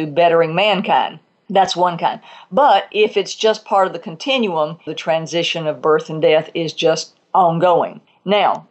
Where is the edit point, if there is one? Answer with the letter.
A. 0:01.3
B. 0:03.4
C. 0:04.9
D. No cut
C